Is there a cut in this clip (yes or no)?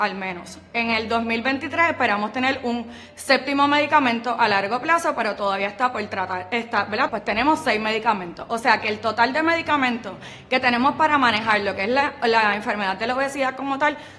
yes